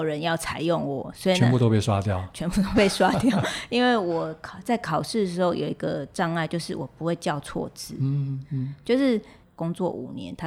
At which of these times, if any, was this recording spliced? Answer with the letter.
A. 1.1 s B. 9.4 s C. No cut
B